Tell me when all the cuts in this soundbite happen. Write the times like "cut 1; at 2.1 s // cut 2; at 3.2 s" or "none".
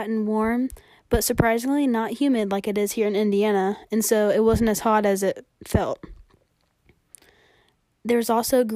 none